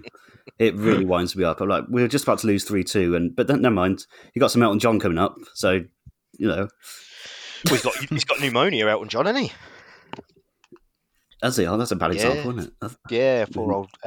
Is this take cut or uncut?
uncut